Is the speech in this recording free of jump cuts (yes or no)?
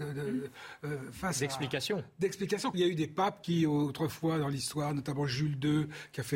no